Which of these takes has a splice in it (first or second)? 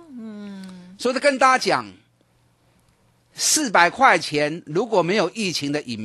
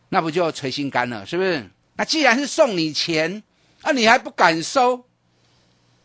second